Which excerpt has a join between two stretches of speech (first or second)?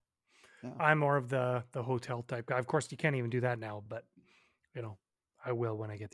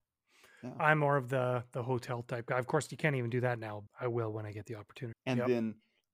second